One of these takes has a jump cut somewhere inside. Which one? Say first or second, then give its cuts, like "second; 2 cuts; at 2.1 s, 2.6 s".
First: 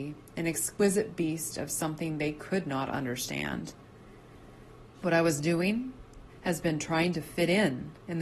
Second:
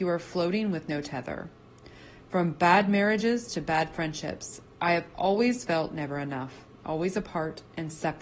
first; 2 cuts; at 4.9 s, 6.3 s